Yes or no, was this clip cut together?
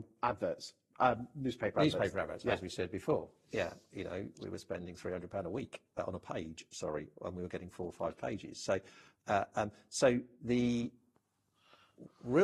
no